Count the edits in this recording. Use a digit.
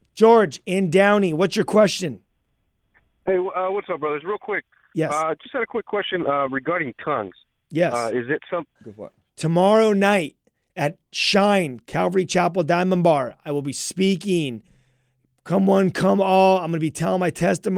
1